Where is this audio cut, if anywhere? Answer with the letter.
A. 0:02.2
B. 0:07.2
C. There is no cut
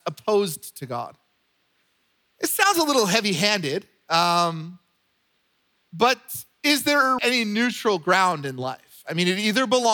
B